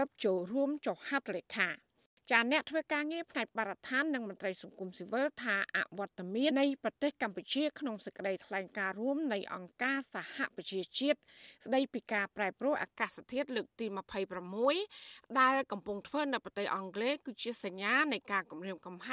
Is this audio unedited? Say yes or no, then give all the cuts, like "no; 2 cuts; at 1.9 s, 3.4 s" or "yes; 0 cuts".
no; 1 cut; at 6.5 s